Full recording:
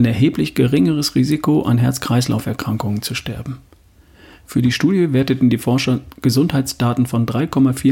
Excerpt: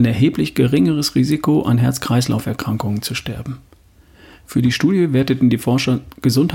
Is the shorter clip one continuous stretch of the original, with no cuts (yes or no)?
yes